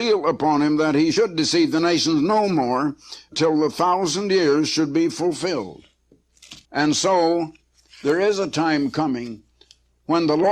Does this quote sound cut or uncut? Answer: cut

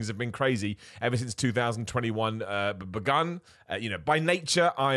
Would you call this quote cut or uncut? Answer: cut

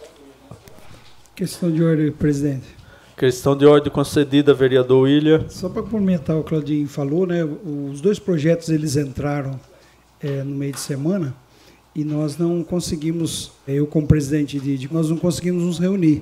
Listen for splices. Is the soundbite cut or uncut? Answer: cut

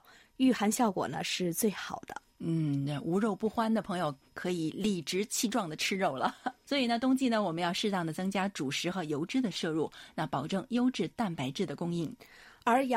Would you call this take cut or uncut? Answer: cut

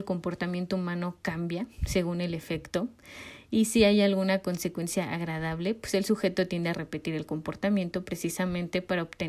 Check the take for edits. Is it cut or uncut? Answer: uncut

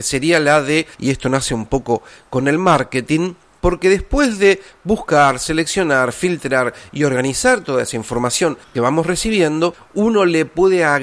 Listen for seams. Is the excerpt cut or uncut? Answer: uncut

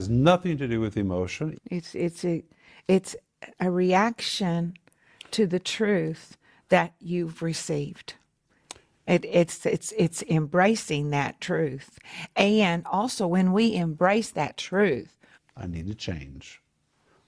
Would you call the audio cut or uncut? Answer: cut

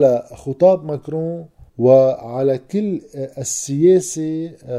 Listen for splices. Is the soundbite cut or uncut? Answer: cut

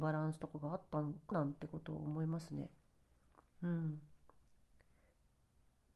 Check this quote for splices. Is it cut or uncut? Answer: cut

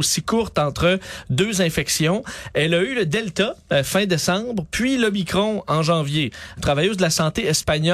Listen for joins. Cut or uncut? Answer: cut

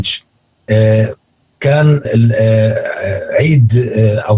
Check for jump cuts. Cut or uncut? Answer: cut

